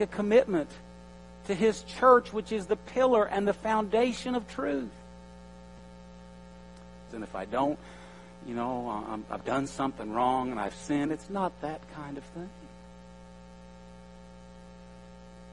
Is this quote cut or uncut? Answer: cut